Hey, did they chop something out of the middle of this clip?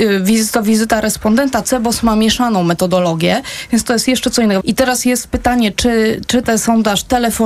yes; 1 cut; at 4.6 s

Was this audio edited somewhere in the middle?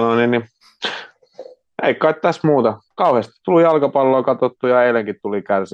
yes; 1 cut; at 2.8 s

